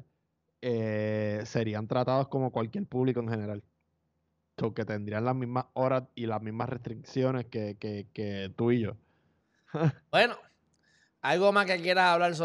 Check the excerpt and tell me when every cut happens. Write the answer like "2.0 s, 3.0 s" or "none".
9.4 s